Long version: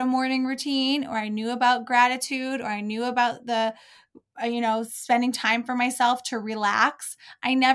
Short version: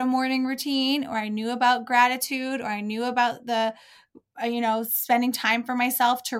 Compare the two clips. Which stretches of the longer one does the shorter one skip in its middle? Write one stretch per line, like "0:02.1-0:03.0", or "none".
none